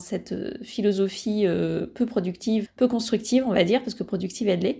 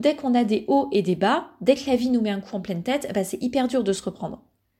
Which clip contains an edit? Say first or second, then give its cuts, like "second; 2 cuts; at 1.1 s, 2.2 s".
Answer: first; 1 cut; at 2.7 s